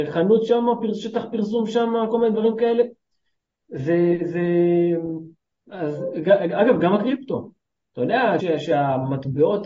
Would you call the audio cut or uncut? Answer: cut